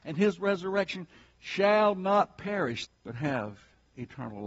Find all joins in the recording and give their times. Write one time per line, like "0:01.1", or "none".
0:02.8